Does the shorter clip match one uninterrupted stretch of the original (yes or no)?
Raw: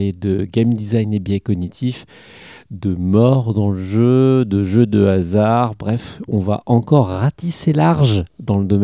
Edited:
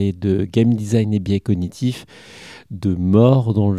yes